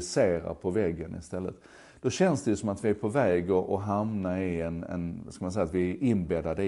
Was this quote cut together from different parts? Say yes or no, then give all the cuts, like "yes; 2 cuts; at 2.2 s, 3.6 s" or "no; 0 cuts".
no; 0 cuts